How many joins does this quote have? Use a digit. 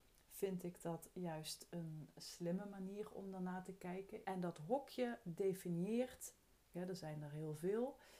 2